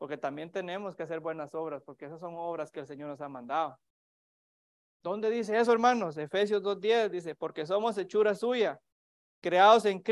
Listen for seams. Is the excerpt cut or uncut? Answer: uncut